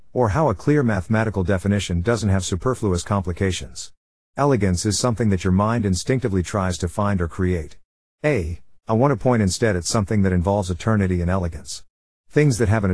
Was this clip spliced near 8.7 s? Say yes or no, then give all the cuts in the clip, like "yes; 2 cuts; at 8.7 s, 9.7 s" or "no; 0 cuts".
yes; 1 cut; at 8.7 s